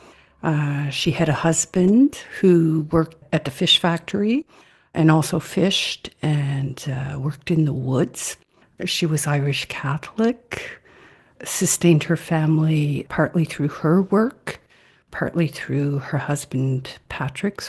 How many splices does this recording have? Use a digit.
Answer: 1